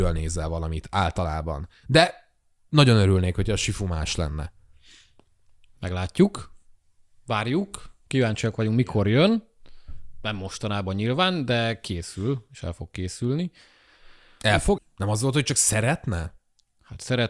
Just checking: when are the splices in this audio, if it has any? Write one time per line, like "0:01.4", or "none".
0:14.8